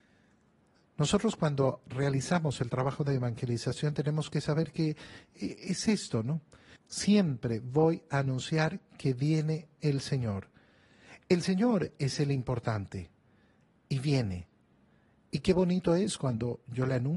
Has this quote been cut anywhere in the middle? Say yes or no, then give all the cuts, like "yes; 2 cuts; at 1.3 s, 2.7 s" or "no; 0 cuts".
yes; 1 cut; at 6.8 s